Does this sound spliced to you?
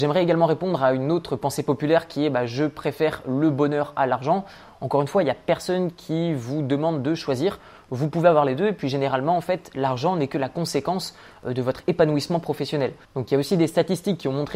yes; 1 cut; at 13.0 s

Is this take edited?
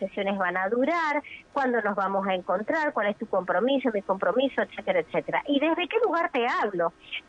no; 0 cuts

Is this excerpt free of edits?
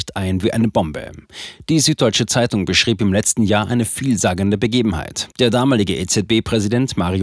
no; 1 cut; at 5.3 s

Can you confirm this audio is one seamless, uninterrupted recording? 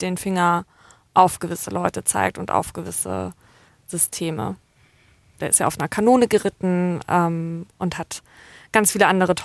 no; 1 cut; at 5.4 s

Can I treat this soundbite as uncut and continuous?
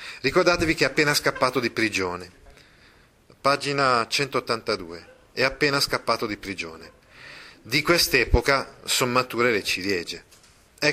yes; 0 cuts

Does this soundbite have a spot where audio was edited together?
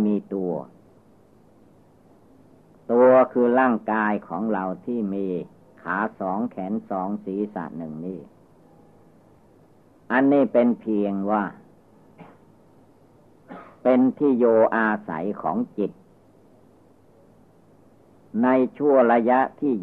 no; 0 cuts

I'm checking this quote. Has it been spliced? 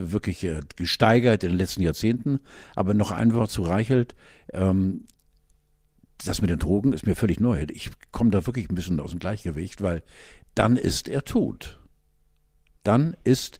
no; 0 cuts

